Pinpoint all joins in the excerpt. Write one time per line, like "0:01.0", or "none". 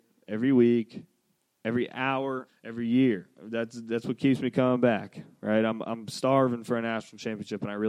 0:02.5